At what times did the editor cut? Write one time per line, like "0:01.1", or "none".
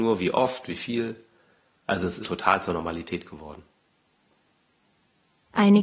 0:02.2